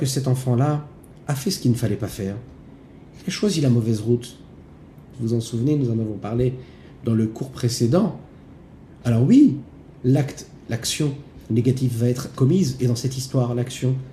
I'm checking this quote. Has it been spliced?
yes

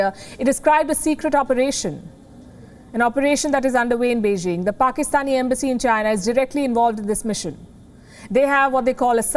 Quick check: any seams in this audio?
no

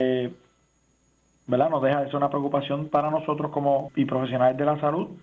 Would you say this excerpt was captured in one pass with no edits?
no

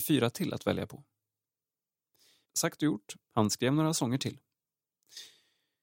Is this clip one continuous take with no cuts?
no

